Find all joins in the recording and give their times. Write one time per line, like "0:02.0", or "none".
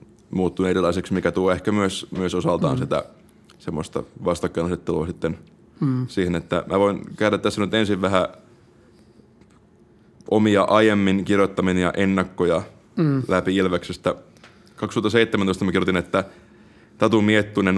none

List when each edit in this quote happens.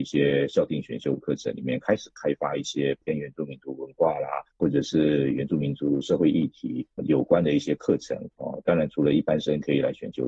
0:04.5

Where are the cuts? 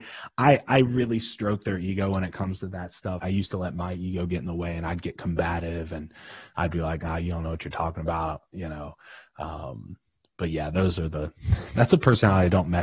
0:03.2

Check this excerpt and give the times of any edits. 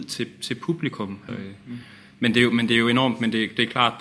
0:01.3

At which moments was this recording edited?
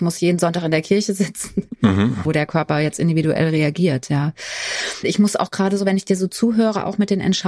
0:02.3
0:05.0

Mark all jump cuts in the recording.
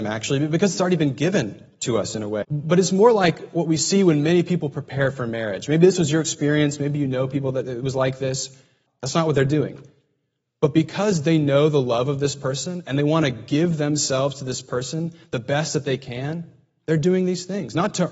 0:02.4
0:08.9

